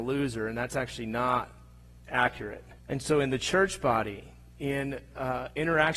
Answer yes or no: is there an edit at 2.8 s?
yes